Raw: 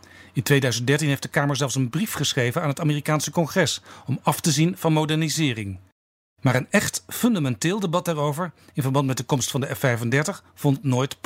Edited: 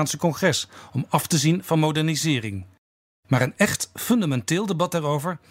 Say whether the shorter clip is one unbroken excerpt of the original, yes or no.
yes